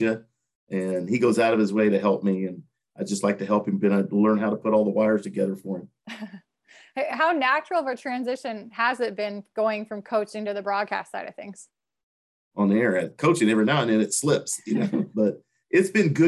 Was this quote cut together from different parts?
yes; 3 cuts; at 7.1 s, 12.5 s, 15.1 s

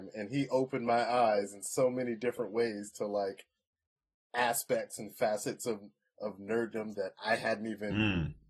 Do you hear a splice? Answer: no; 0 cuts

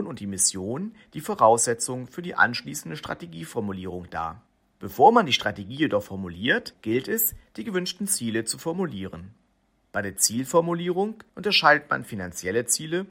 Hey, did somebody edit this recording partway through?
no; 0 cuts

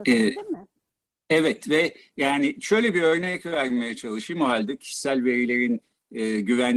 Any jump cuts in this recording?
no; 0 cuts

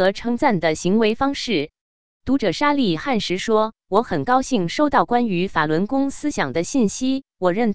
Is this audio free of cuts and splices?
no; 1 cut; at 1.8 s

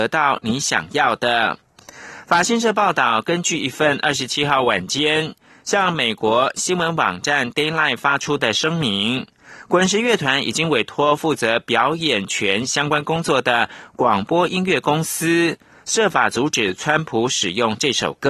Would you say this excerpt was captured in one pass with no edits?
yes; 0 cuts

